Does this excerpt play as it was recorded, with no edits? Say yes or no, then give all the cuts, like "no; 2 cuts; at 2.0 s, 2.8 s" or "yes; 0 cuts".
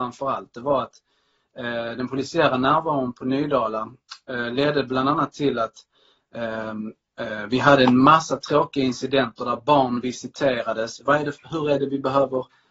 no; 1 cut; at 11.0 s